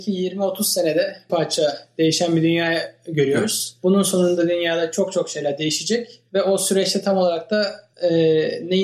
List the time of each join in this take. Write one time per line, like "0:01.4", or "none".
0:01.3